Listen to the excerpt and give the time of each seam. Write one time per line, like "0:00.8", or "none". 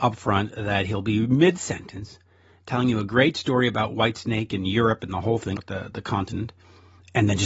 0:05.6